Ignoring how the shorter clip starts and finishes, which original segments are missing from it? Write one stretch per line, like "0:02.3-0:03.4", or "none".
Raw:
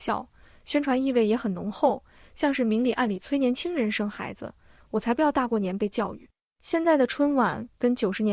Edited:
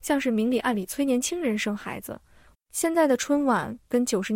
0:04.9-0:06.4